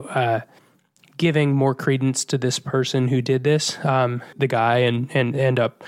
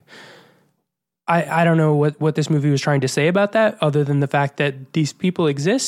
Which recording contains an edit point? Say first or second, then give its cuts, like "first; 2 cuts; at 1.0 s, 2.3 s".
first; 1 cut; at 4.3 s